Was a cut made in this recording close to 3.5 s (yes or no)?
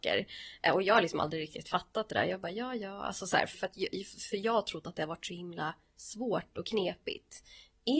yes